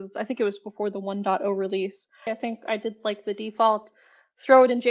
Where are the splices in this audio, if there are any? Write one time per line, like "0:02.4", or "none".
0:02.3